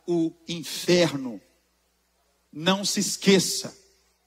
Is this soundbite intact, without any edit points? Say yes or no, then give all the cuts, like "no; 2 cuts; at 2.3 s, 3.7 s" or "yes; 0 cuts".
no; 1 cut; at 2.5 s